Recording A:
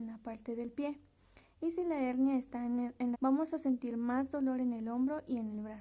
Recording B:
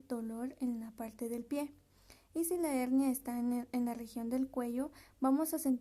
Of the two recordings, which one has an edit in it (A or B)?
A